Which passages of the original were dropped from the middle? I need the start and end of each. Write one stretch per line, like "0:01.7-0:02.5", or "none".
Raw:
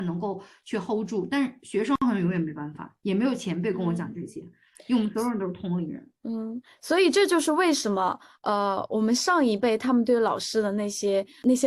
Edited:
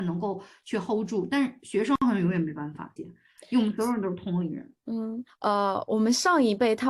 0:03.0-0:04.3
0:06.7-0:08.3